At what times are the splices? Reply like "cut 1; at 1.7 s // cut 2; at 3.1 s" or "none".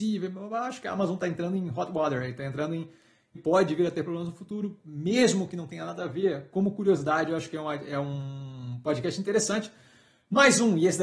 cut 1; at 3.4 s